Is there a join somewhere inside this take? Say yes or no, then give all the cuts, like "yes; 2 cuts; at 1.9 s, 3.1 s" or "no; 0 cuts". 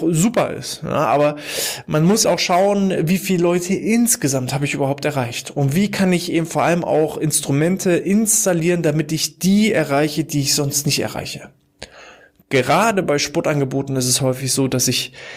yes; 1 cut; at 2.2 s